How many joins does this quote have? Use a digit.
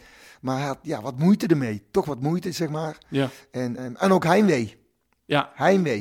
1